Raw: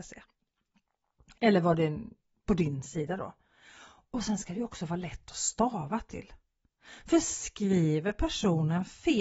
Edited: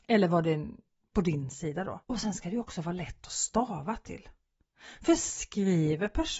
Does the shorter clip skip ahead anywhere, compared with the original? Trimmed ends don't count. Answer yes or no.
yes